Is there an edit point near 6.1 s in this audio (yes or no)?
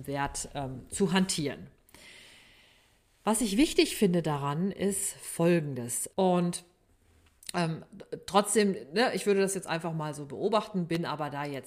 yes